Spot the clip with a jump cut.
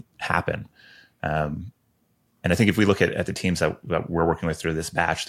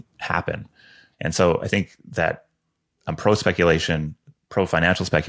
second; 1 cut; at 1.1 s

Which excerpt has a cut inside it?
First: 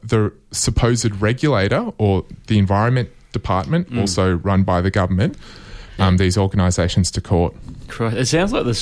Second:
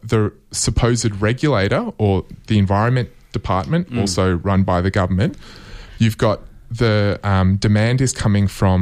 first; 1 cut; at 6.0 s

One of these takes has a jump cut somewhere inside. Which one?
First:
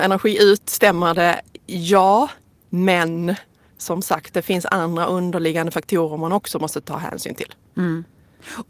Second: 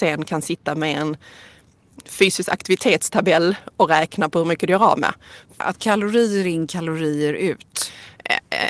second; 2 cuts; at 2.0 s, 5.6 s

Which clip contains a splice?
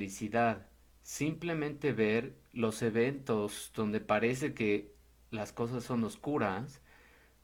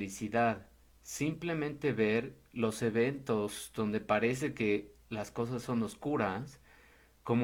second; 1 cut; at 5.0 s

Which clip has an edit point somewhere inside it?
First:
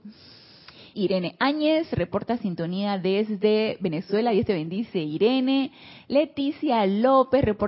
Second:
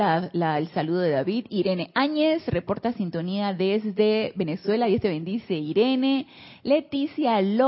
first; 1 cut; at 0.9 s

